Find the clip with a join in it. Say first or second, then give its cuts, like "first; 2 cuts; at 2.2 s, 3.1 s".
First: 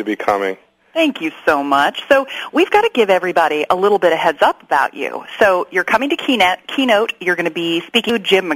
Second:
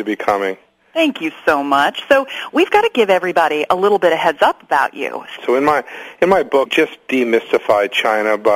second; 2 cuts; at 5.4 s, 6.7 s